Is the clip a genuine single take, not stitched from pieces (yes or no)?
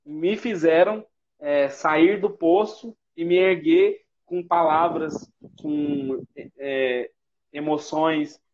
yes